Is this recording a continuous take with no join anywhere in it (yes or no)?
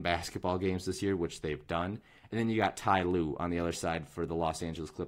yes